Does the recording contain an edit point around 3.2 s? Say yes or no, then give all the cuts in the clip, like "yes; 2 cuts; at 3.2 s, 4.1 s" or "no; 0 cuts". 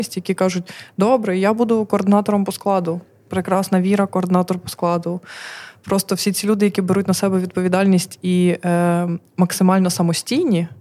no; 0 cuts